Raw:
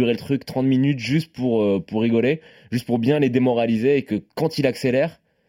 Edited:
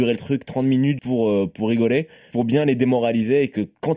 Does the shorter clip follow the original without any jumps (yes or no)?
no